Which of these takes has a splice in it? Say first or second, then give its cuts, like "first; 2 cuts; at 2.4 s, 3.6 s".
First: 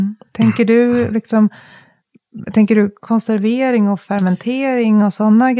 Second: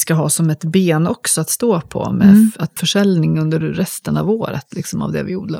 second; 1 cut; at 2.8 s